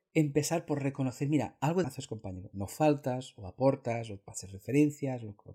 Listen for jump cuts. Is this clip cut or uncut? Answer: cut